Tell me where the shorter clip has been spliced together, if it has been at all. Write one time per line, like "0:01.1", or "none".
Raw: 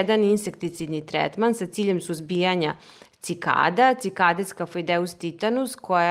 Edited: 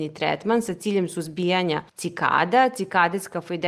0:01.9

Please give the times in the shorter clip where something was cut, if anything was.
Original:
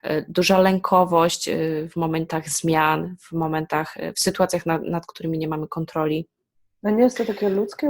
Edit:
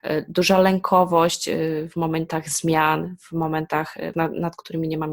0:04.1

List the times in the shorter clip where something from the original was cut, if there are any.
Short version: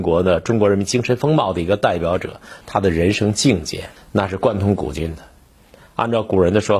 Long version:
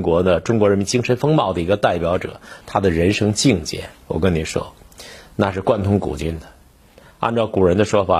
0:04.0

